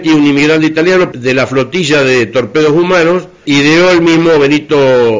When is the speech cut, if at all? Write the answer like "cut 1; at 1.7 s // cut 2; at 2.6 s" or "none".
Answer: cut 1; at 1.1 s // cut 2; at 3.4 s